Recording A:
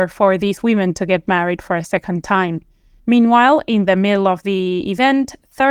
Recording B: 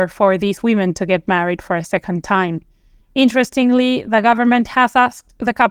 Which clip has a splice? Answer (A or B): A